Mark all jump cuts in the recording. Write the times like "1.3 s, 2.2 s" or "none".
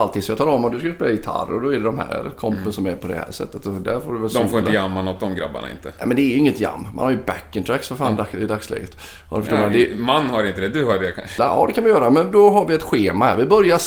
11.4 s